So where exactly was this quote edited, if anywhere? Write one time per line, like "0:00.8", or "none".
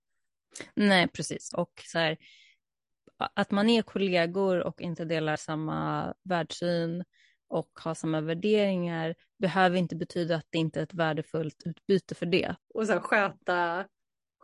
0:01.5
0:12.6